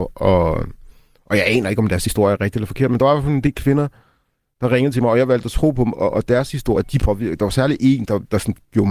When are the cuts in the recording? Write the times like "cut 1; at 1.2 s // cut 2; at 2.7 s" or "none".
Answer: cut 1; at 6.8 s